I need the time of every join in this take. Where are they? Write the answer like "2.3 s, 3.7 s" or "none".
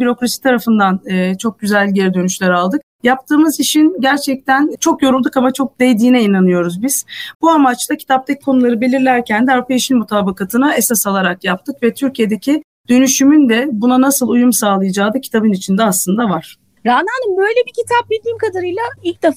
7.3 s